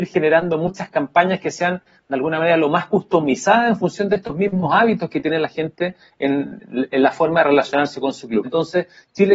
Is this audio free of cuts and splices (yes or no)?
no